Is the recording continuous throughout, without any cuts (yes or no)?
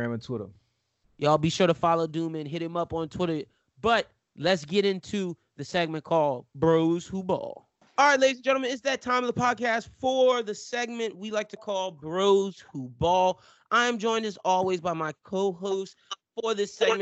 yes